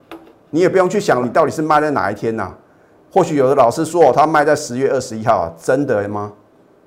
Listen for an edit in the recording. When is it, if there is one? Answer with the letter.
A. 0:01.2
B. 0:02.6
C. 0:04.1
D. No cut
A